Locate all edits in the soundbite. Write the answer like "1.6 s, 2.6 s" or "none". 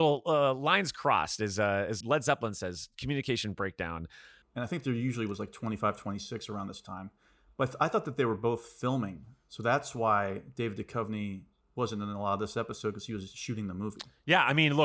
2.0 s, 4.4 s